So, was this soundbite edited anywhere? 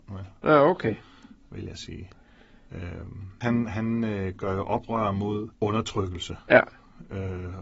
yes; 2 cuts; at 3.4 s, 5.5 s

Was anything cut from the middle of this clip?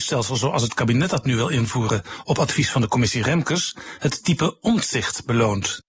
no; 0 cuts

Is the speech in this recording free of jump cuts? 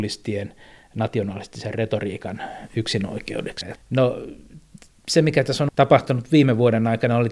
no; 1 cut; at 3.8 s

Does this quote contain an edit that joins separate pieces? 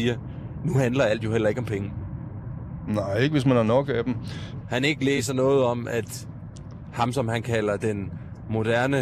yes; 1 cut; at 4.6 s

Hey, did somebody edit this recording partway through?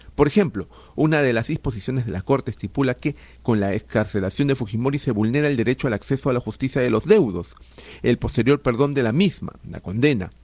no; 0 cuts

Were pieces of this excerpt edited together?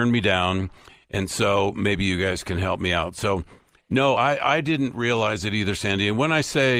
no; 0 cuts

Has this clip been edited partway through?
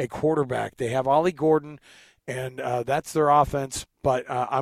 no; 0 cuts

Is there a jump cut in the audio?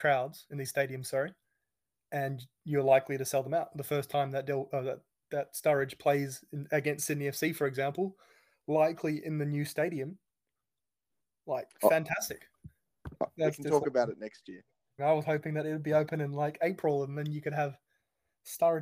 yes; 2 cuts; at 13.4 s, 15.0 s

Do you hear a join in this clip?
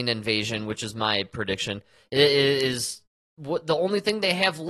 no; 0 cuts

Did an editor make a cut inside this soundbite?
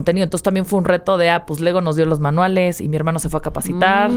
no; 0 cuts

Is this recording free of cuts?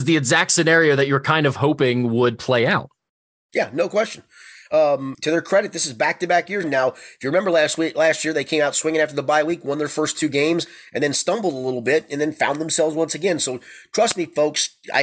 no; 2 cuts; at 5.1 s, 6.6 s

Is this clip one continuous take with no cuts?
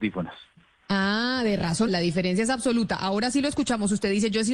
no; 1 cut; at 1.9 s

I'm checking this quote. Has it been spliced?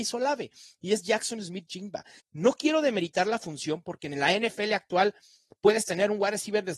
yes; 1 cut; at 2.2 s

